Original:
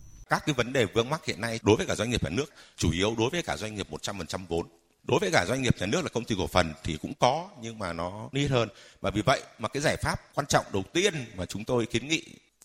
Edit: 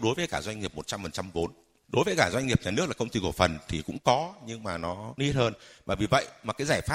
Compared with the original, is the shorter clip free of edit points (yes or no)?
yes